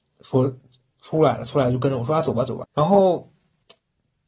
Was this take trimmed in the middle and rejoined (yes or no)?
yes